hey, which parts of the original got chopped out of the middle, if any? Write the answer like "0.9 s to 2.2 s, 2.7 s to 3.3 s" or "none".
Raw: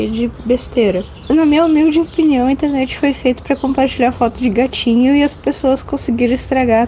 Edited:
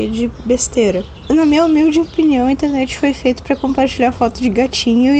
none

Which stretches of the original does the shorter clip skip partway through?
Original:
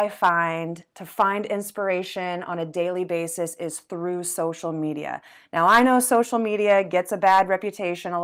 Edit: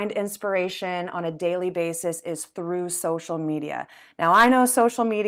none

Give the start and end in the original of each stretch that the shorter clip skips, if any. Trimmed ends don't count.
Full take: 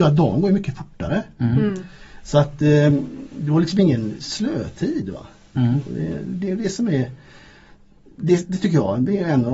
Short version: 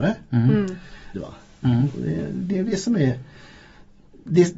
2.2 s to 5.1 s

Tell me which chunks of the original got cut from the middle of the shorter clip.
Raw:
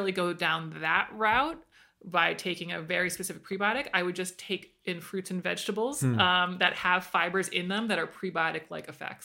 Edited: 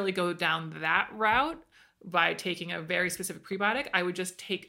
none

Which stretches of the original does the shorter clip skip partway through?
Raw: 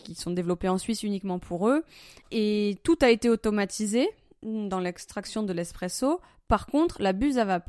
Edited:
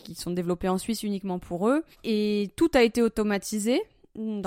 1.9 s to 2.2 s

